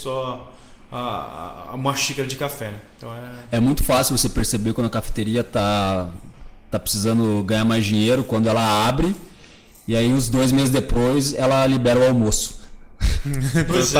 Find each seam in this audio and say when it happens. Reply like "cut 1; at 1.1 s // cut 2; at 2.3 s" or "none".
none